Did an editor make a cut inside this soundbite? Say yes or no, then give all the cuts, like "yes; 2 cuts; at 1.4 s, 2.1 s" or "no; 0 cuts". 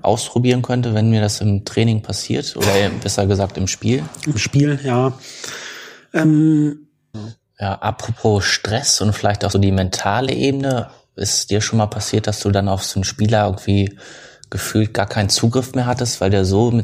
yes; 2 cuts; at 7.1 s, 9.5 s